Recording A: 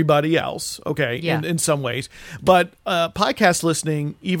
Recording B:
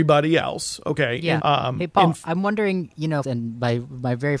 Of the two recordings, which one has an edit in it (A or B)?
B